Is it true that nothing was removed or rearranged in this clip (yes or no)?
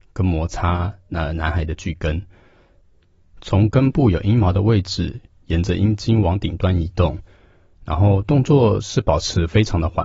yes